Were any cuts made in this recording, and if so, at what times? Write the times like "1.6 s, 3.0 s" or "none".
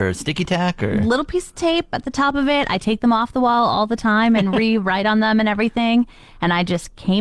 none